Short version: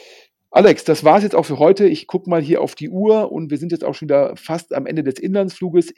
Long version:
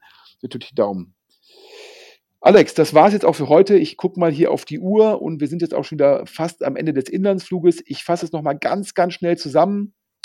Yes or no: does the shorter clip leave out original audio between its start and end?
no